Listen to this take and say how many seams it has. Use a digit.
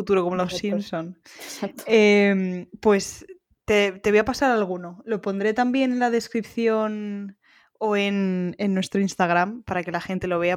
0